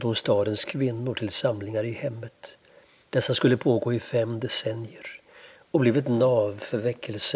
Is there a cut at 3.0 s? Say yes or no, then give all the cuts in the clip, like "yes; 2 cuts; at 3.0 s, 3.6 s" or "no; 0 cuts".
yes; 1 cut; at 3.0 s